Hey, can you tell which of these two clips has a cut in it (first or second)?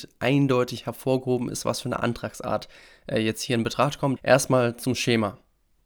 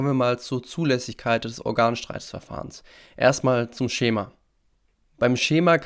first